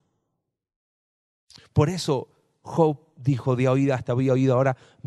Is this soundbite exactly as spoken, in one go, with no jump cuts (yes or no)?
yes